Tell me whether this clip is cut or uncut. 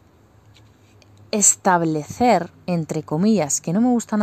uncut